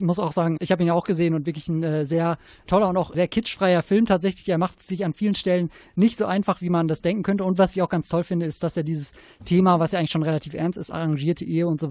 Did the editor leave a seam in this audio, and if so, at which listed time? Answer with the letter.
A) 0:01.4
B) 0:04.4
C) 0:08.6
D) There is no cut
D